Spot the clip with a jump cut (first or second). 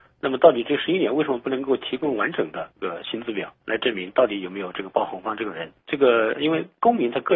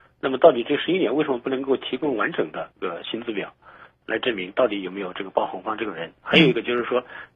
first